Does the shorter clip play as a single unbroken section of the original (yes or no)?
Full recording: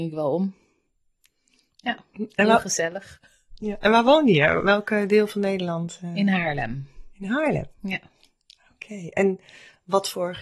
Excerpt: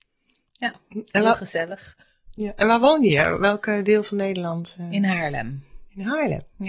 yes